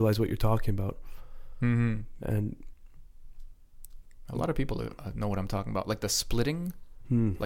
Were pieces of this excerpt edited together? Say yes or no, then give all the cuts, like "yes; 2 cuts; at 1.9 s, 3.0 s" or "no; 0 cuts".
yes; 1 cut; at 2.2 s